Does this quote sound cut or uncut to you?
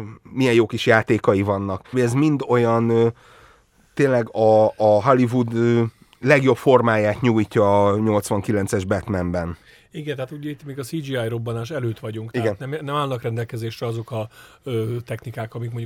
cut